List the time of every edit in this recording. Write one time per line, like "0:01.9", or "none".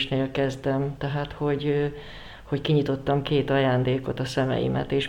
none